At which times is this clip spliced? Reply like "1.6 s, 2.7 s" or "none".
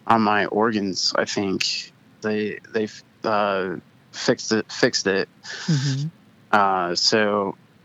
2.2 s